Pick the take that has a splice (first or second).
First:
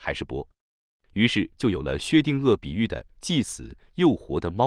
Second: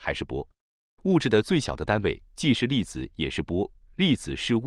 second